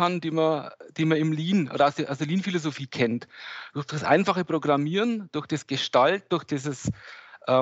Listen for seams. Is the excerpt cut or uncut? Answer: uncut